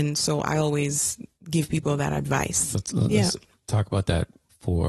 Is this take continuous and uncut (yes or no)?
no